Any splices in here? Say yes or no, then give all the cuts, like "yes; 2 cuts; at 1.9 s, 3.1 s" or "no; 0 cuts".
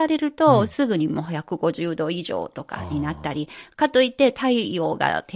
no; 0 cuts